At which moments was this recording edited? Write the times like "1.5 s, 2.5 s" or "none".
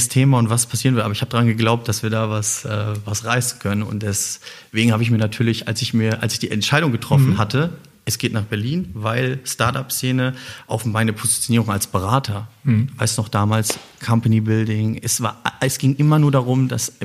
none